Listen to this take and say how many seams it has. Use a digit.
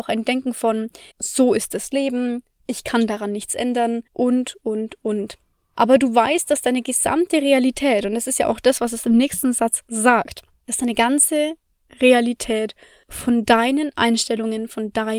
2